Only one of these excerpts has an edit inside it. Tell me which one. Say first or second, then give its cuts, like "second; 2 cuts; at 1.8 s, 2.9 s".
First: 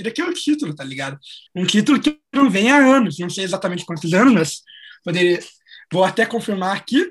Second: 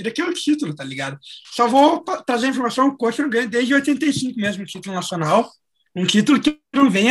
second; 2 cuts; at 1.4 s, 5.9 s